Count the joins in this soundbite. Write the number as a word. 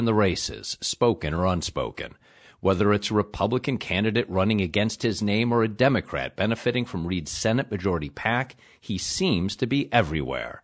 zero